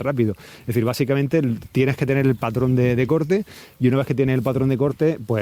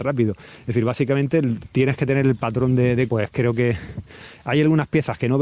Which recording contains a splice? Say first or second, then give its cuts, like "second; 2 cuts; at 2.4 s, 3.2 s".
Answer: second; 1 cut; at 3.1 s